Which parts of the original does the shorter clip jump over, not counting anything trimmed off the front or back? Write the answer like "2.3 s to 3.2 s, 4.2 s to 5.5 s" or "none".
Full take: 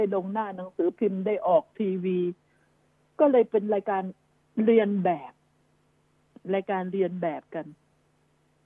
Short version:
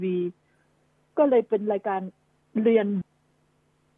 5.0 s to 5.3 s